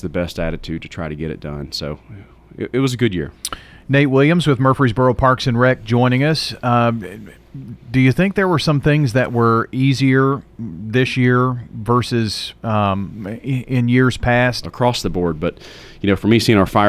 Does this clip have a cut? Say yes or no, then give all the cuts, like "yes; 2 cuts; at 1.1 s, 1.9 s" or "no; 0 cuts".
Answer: yes; 1 cut; at 14.6 s